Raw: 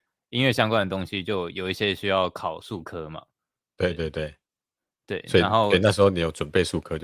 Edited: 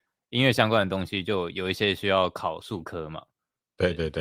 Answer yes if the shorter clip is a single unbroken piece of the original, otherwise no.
yes